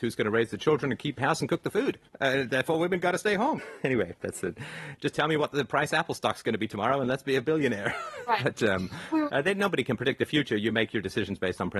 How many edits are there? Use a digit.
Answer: 3